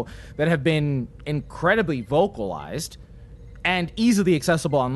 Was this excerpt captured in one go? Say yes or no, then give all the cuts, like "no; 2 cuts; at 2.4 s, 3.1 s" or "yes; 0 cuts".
yes; 0 cuts